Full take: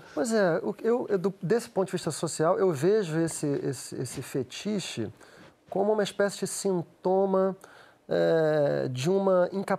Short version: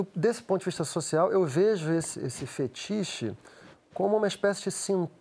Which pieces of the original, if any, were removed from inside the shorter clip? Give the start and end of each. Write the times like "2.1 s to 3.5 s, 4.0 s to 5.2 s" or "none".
3.4 s to 3.9 s